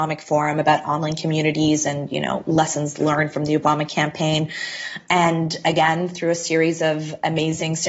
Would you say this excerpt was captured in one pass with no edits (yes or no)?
yes